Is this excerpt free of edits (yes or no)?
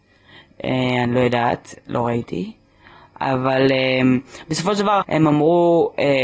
no